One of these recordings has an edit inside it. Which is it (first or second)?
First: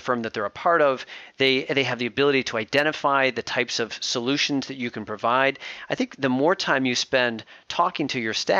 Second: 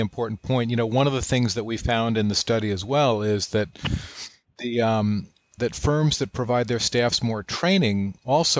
second